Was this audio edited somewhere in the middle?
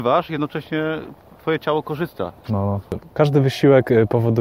yes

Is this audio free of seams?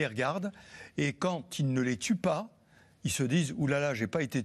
yes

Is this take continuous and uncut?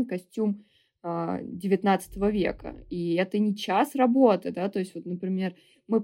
yes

